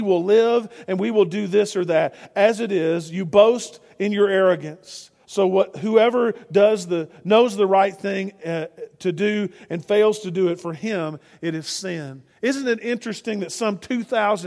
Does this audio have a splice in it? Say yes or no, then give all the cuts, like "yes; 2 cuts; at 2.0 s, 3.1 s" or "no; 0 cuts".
yes; 1 cut; at 5.2 s